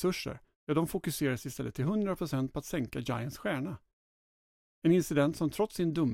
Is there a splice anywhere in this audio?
no; 0 cuts

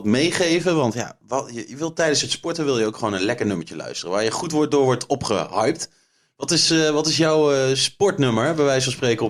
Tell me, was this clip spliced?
no; 0 cuts

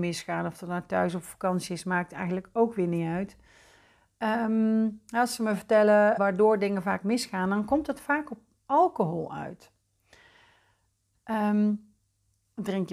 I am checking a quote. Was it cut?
yes; 2 cuts; at 6.2 s, 11.1 s

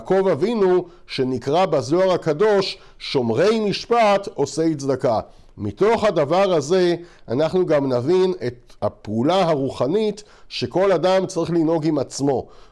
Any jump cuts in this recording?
no; 0 cuts

